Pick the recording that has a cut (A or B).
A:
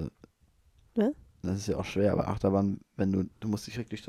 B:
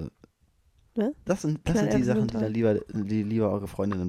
B